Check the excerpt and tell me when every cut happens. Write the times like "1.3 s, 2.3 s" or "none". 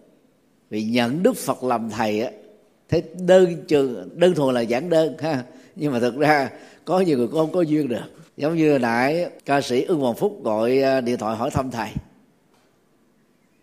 4.1 s, 8.3 s, 9.4 s